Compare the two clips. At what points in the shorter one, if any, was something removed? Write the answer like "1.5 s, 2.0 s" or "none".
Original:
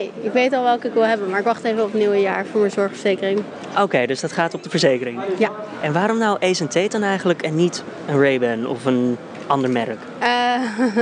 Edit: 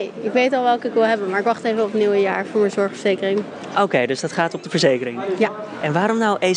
none